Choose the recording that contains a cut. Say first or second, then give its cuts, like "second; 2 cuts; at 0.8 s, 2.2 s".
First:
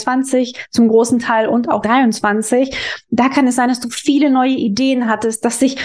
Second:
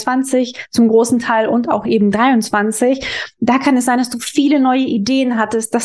first; 1 cut; at 1.8 s